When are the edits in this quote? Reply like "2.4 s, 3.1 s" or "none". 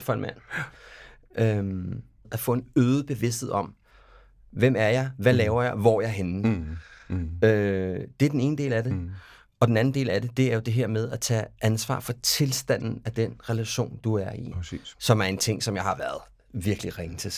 none